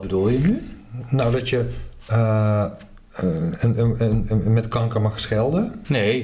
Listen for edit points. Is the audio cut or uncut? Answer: uncut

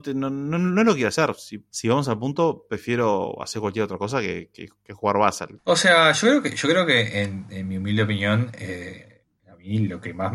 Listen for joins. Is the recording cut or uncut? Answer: cut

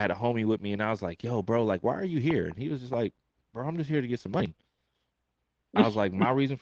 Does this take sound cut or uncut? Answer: uncut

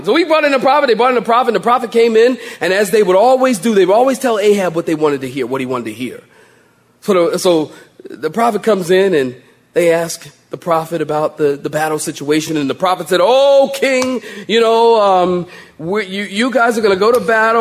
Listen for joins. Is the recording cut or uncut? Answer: uncut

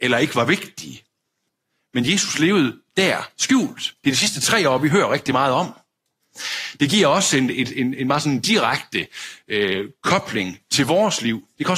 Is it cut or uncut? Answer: uncut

